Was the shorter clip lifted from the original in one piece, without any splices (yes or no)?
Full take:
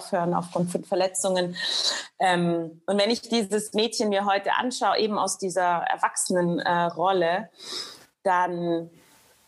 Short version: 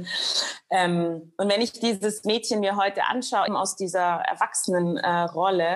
no